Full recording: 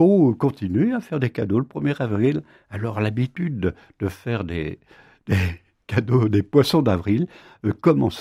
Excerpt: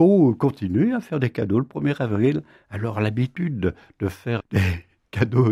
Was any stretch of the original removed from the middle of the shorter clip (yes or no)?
yes